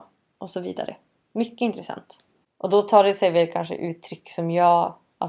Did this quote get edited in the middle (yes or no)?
yes